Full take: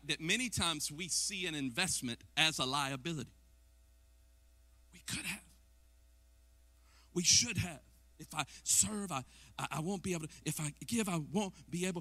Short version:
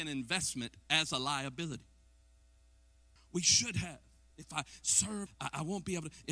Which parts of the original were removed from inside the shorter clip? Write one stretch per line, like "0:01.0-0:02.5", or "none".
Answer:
0:04.6-0:07.0
0:09.1-0:09.4